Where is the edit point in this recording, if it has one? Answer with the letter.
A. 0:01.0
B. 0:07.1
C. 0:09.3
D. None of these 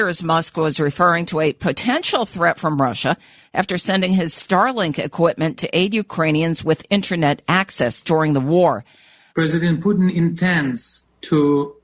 C